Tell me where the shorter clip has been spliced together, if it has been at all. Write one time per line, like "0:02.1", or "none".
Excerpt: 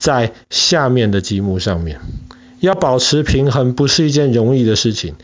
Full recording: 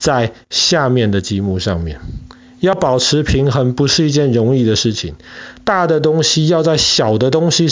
none